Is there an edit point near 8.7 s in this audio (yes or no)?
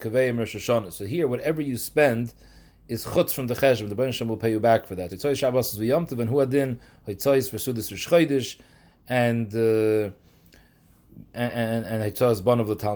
no